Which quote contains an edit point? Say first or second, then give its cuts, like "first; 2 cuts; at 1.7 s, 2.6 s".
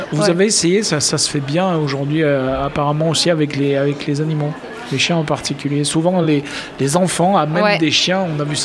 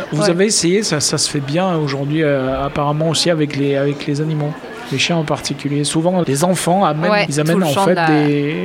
second; 2 cuts; at 6.2 s, 7.3 s